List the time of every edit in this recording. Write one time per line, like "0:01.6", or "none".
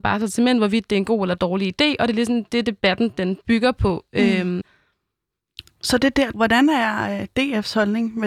0:04.6
0:06.3